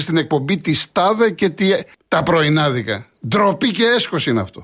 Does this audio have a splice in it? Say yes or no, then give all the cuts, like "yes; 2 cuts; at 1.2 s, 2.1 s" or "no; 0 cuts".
yes; 1 cut; at 1.9 s